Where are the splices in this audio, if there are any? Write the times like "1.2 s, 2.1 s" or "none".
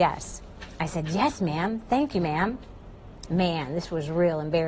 3.3 s